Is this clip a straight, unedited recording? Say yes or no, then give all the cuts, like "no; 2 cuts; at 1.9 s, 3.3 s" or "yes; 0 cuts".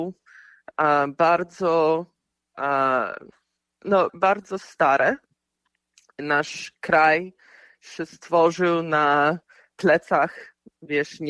no; 1 cut; at 4.1 s